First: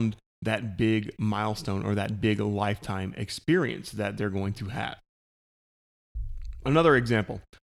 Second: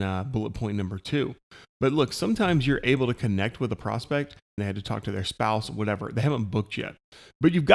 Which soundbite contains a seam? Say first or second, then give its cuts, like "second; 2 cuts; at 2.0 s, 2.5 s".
second; 1 cut; at 4.6 s